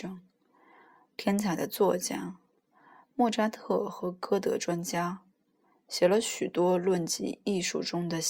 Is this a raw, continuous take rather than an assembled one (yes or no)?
yes